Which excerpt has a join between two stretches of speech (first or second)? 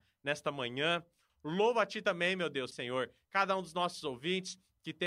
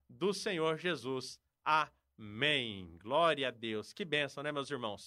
first